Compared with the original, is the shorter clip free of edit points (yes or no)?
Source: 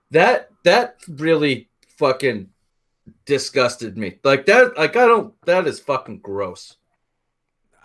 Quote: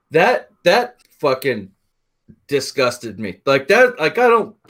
no